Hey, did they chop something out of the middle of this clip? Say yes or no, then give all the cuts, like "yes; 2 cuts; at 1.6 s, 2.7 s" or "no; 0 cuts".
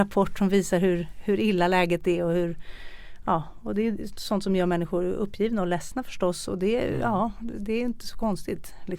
no; 0 cuts